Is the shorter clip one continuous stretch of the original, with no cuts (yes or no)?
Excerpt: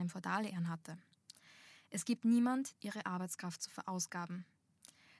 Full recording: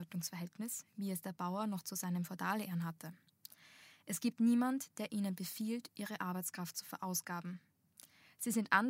no